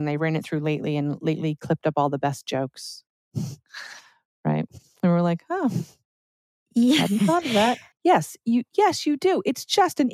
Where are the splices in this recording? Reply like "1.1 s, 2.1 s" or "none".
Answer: 7.9 s